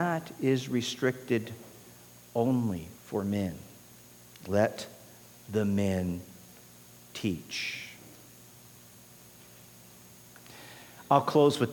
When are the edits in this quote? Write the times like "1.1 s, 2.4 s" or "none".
2.9 s